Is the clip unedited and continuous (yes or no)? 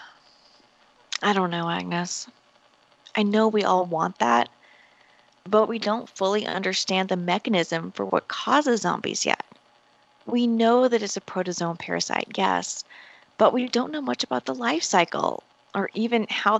yes